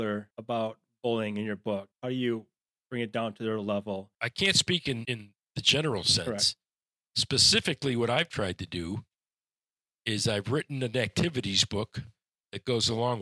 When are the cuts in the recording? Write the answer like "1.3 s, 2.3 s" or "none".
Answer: none